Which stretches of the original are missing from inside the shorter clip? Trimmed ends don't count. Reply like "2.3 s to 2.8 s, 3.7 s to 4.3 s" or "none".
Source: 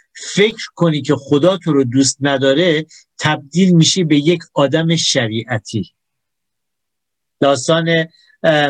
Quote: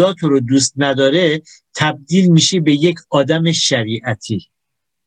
none